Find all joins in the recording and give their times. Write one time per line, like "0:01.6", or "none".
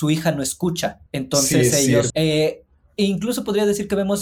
0:01.1
0:02.1